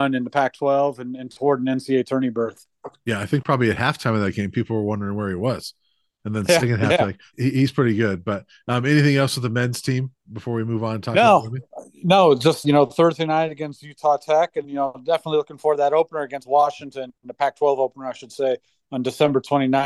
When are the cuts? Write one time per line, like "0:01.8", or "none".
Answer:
0:07.3
0:12.6
0:14.6

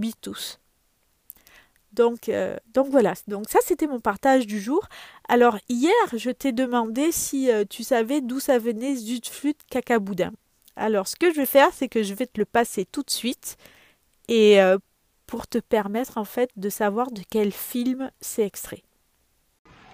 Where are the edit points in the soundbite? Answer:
none

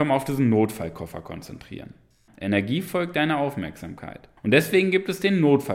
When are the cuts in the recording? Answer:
0:02.3
0:04.4

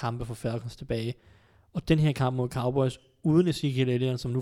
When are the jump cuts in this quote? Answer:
none

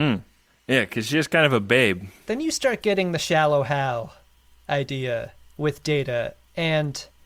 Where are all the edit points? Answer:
none

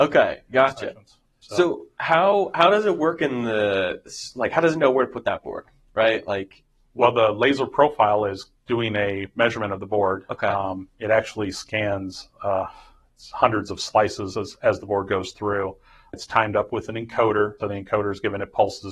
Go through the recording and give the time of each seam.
0:16.1
0:17.6

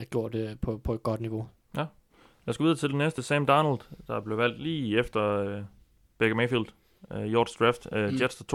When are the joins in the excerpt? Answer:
none

